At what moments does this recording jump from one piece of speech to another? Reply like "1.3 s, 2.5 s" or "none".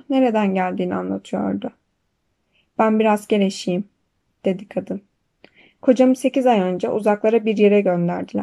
none